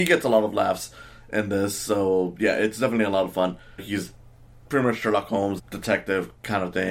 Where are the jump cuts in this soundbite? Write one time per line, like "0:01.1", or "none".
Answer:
0:03.8
0:05.6